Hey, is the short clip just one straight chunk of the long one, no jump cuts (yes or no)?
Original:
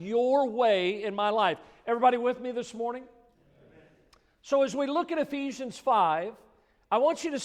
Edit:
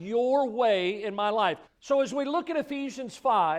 no